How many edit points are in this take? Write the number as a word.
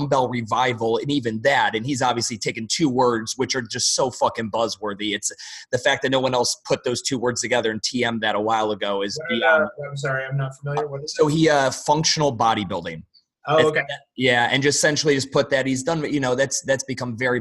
zero